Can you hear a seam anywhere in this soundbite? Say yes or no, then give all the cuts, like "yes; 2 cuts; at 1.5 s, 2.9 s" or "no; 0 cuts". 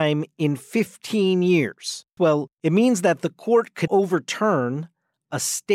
yes; 2 cuts; at 2.2 s, 3.9 s